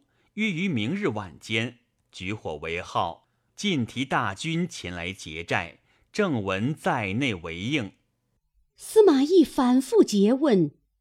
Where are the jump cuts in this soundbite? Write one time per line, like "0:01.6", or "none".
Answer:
0:03.5